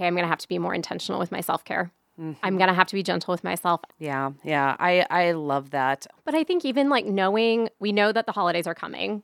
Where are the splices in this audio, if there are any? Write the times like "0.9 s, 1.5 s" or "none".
3.9 s, 6.2 s